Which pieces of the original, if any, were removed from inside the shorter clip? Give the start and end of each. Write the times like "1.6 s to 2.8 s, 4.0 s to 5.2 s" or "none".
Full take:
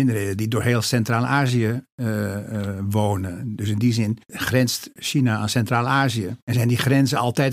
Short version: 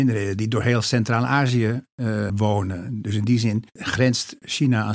2.3 s to 2.8 s